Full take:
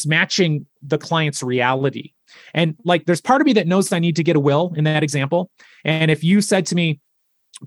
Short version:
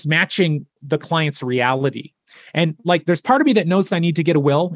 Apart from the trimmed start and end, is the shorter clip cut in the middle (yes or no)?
no